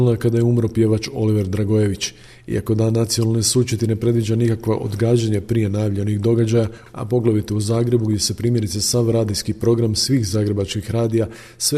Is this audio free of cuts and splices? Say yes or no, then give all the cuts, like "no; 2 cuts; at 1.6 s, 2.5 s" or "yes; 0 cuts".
no; 1 cut; at 6.9 s